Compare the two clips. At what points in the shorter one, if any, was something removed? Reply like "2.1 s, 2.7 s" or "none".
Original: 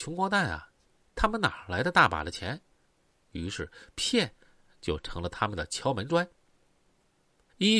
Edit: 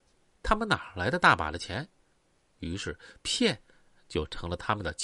none